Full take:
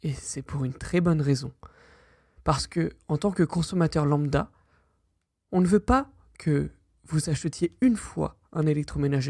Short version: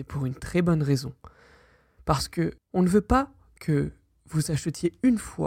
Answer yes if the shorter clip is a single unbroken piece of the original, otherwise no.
no